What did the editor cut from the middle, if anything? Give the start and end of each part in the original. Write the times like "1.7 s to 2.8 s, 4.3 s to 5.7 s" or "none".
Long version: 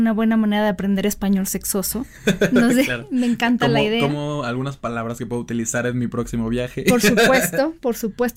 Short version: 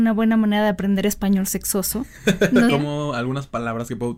2.7 s to 4.0 s